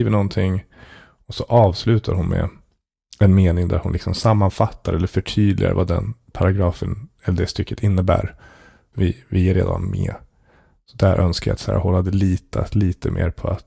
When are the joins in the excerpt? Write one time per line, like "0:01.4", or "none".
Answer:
0:08.9